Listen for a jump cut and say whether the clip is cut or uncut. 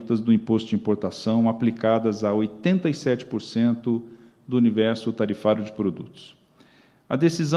uncut